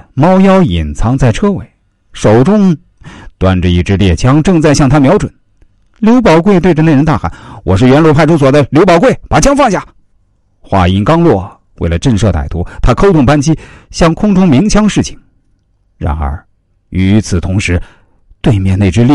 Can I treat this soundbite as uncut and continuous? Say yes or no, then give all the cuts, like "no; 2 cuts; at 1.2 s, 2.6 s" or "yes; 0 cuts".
yes; 0 cuts